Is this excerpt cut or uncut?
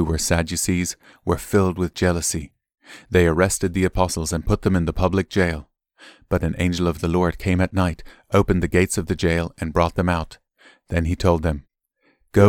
uncut